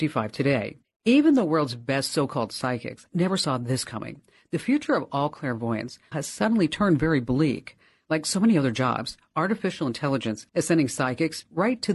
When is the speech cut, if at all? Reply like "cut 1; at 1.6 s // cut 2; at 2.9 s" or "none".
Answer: cut 1; at 6.1 s // cut 2; at 10.5 s